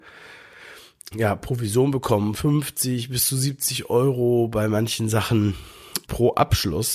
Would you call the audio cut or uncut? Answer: cut